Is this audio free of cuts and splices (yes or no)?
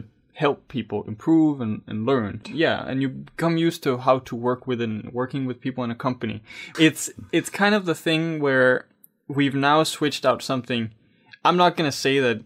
no